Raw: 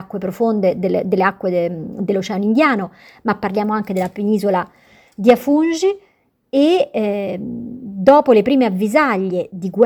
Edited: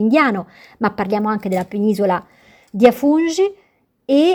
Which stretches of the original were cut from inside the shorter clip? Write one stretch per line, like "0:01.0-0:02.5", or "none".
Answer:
none